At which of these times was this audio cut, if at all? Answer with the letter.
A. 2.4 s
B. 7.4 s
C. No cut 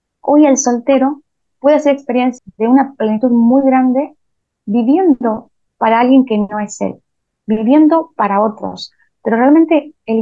A